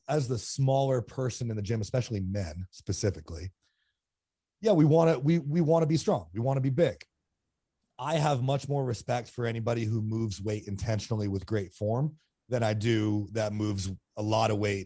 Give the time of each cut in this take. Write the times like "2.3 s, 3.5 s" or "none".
none